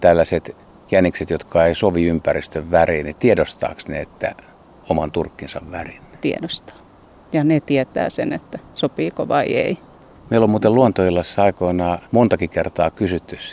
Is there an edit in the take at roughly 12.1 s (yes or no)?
yes